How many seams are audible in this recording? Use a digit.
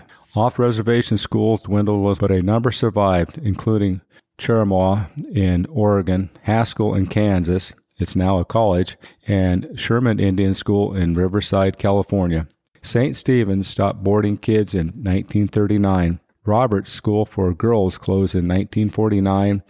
2